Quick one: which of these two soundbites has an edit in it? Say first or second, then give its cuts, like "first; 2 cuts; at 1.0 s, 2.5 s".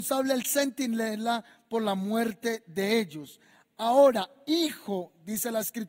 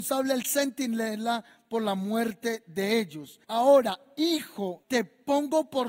second; 2 cuts; at 3.4 s, 4.8 s